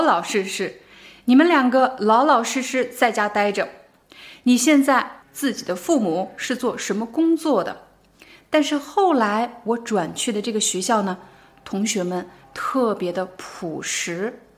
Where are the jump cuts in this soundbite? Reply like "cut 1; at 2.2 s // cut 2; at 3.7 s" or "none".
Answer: cut 1; at 5.2 s